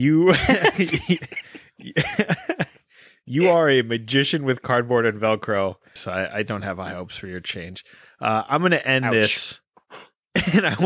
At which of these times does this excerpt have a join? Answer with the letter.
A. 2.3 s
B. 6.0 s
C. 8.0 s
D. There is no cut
B